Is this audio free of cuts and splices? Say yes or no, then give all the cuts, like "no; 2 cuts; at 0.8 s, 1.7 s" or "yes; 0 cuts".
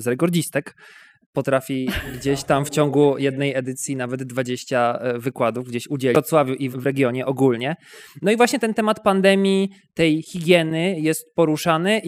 no; 1 cut; at 6.7 s